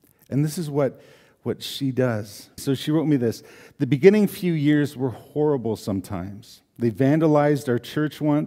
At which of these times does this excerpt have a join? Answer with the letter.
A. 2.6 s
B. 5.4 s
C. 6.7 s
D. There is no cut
A